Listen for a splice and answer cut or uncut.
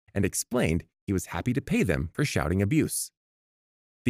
uncut